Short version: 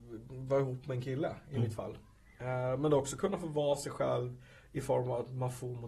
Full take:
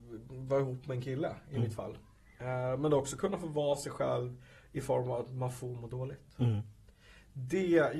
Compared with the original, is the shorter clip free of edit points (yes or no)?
yes